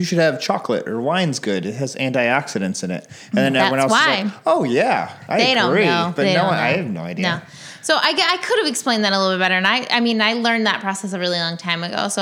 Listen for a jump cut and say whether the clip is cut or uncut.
uncut